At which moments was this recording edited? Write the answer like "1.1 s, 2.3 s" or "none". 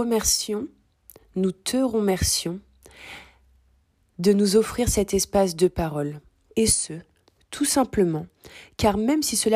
6.5 s